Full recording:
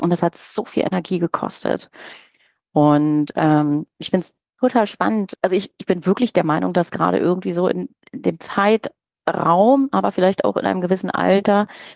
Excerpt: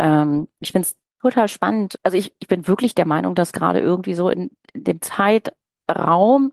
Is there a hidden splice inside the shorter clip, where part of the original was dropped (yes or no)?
no